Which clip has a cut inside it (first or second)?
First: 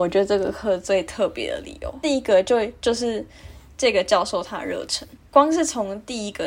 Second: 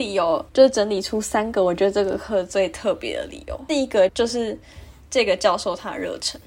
second